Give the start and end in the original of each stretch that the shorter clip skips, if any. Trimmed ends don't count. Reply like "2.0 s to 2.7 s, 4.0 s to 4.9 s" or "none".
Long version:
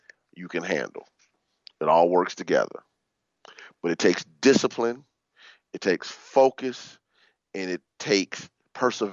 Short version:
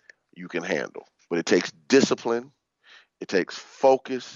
1.2 s to 3.8 s

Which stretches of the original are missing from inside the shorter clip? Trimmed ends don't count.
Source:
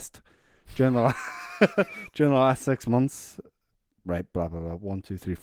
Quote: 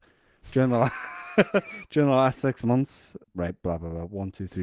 3.5 s to 3.9 s

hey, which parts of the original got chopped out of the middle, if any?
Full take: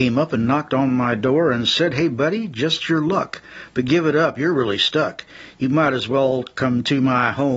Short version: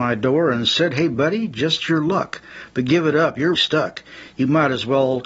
4.5 s to 4.8 s

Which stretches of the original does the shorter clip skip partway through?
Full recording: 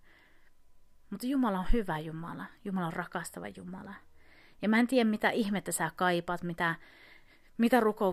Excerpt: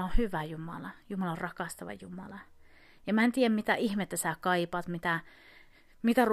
none

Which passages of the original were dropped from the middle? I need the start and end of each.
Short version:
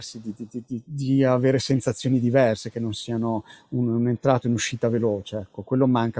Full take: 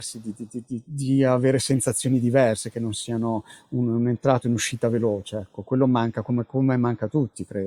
none

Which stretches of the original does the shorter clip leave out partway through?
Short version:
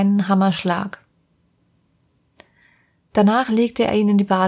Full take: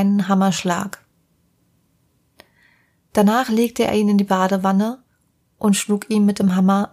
none

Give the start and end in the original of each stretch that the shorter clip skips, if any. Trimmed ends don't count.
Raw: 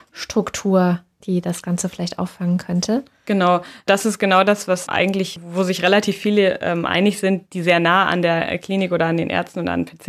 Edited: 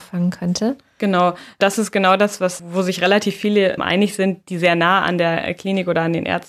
4.9 s to 5.4 s, 6.6 s to 6.8 s

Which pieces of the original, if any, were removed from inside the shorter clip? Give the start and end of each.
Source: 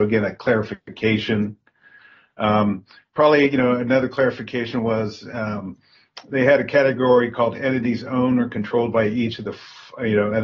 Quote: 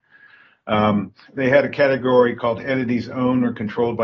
3.0 s to 6.2 s

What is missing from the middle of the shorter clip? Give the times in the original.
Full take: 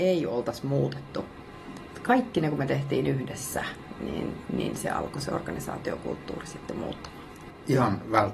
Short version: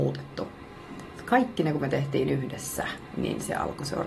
3.9 s to 4.5 s

